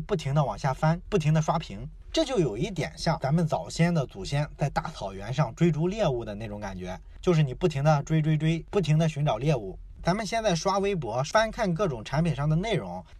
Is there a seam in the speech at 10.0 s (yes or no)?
yes